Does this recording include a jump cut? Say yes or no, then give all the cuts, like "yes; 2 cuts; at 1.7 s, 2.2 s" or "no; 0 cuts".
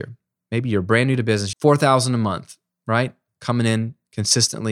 yes; 1 cut; at 1.5 s